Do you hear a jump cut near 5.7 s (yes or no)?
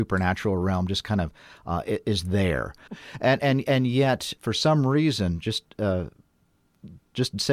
no